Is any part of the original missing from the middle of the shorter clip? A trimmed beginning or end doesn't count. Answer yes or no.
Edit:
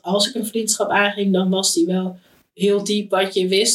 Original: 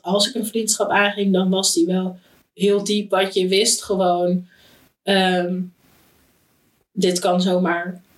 no